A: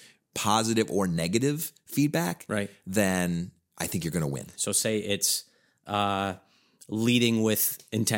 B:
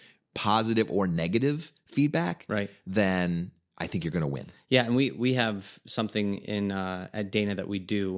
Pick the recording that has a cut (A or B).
A